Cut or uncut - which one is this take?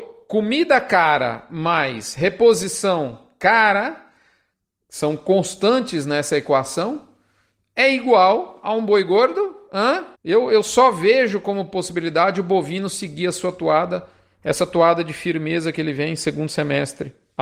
cut